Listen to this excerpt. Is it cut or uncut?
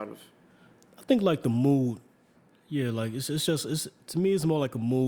uncut